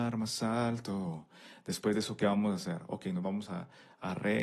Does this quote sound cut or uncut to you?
uncut